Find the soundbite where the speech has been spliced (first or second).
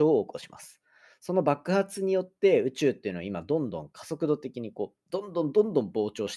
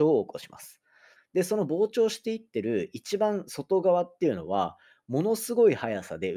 second